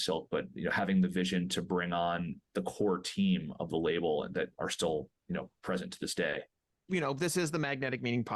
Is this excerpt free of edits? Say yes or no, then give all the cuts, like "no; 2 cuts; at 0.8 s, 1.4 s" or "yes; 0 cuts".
yes; 0 cuts